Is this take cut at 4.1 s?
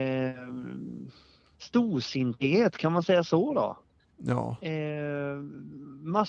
yes; 2 cuts; at 1.5 s, 4.1 s

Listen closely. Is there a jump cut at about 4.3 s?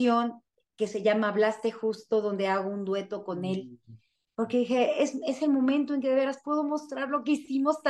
no; 0 cuts

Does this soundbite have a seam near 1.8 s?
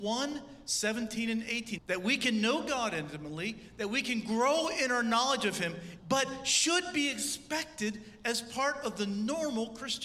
yes; 2 cuts; at 1.8 s, 6.0 s

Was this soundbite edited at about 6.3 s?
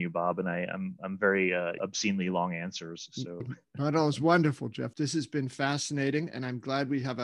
no; 3 cuts; at 1.8 s, 3.4 s, 4.9 s

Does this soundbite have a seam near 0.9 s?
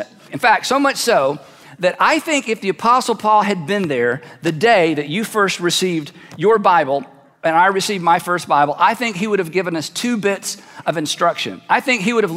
no; 0 cuts

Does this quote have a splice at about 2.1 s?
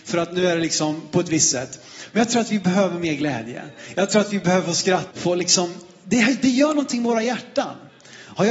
no; 1 cut; at 5.1 s

